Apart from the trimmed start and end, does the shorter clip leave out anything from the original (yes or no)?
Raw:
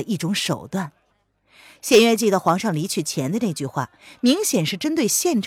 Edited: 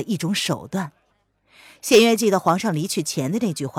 no